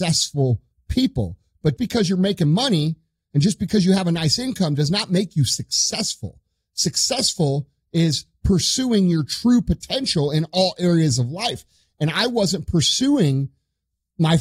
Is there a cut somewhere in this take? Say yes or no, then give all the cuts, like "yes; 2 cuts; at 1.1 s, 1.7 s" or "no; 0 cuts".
yes; 1 cut; at 1.8 s